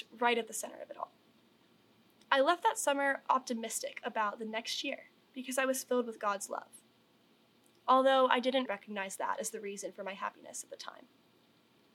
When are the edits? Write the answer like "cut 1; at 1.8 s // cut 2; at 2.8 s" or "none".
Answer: cut 1; at 2.2 s // cut 2; at 8.7 s

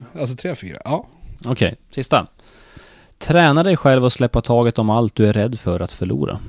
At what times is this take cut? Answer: cut 1; at 1.4 s

